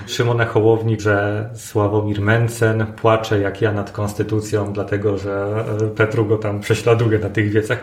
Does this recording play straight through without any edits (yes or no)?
no